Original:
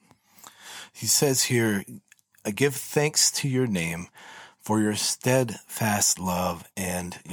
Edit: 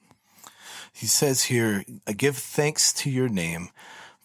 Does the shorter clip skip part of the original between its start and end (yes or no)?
yes